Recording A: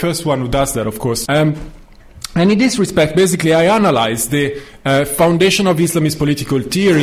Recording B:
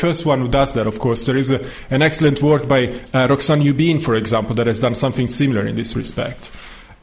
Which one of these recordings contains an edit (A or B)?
A